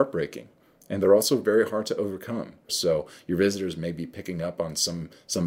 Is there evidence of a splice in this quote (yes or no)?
yes